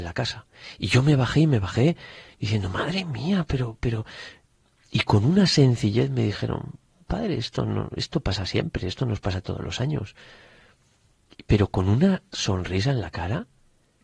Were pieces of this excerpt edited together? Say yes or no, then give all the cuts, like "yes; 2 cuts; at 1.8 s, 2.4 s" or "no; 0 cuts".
no; 0 cuts